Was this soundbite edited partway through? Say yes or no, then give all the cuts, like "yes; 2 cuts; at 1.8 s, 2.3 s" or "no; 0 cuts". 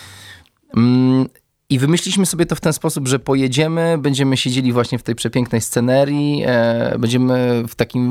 no; 0 cuts